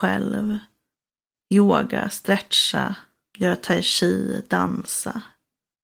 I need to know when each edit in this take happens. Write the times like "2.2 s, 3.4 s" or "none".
none